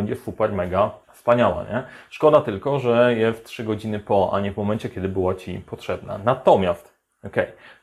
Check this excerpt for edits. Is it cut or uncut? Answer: cut